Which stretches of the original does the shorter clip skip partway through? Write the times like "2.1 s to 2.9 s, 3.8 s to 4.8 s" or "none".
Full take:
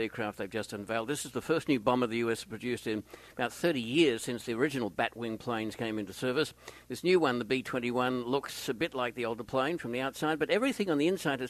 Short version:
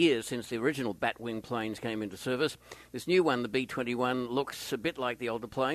none